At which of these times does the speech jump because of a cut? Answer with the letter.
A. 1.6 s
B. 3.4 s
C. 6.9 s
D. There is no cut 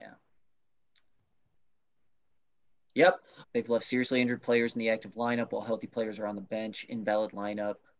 B